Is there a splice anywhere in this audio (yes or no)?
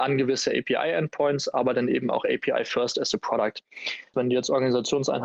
yes